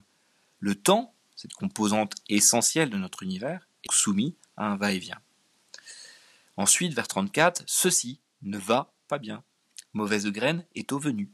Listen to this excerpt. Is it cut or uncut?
cut